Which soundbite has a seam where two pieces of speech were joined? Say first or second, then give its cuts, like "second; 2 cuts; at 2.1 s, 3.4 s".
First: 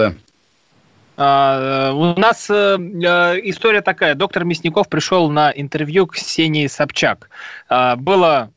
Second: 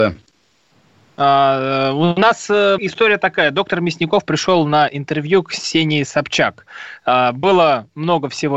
second; 1 cut; at 2.8 s